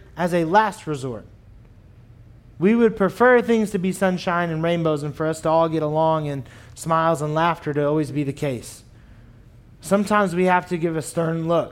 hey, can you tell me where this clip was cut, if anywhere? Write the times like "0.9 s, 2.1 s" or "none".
none